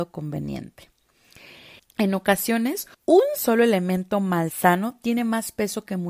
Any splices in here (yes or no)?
yes